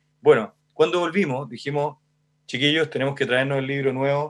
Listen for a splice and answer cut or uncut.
uncut